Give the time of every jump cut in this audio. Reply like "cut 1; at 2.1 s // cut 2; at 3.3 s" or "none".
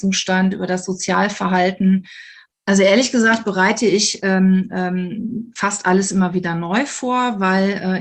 cut 1; at 2.5 s // cut 2; at 5.6 s